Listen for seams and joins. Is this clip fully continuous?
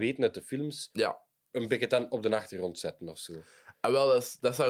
yes; 0 cuts

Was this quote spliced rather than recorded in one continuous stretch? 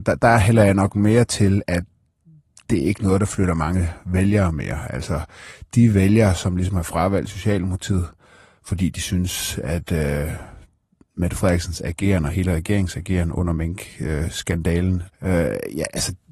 yes; 1 cut; at 15.1 s

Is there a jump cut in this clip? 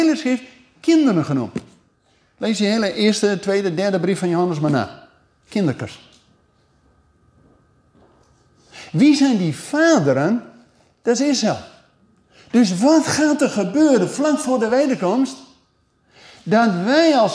no; 0 cuts

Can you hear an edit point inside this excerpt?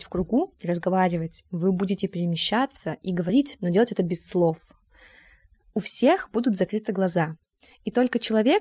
yes; 1 cut; at 5.7 s

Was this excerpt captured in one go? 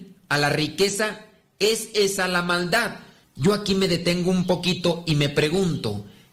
no; 1 cut; at 3.2 s

